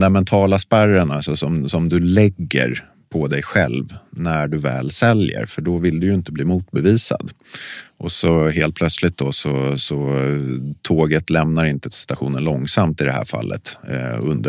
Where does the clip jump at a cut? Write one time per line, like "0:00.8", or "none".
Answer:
none